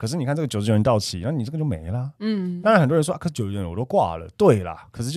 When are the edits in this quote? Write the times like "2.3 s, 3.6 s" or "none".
none